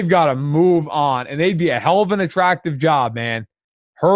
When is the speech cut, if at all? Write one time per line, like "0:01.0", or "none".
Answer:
none